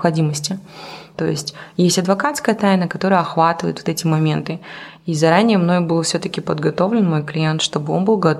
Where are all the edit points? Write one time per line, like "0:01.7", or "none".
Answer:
0:01.1